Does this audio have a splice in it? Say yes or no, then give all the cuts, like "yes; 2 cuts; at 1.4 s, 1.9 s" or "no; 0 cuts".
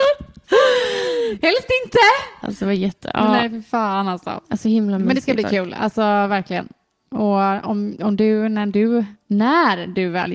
no; 0 cuts